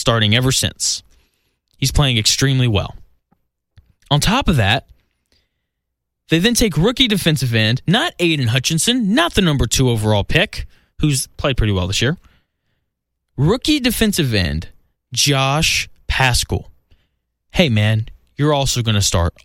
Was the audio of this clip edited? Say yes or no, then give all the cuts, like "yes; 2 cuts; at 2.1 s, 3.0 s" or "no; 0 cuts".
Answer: no; 0 cuts